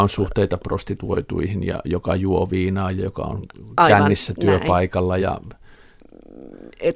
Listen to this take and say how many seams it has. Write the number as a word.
zero